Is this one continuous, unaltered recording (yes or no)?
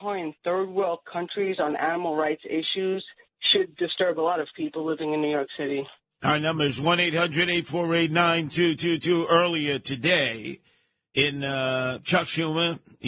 yes